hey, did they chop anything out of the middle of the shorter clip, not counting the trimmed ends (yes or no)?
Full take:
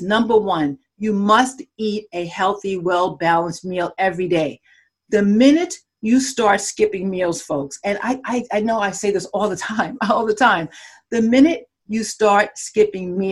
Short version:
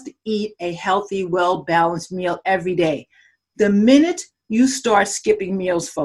no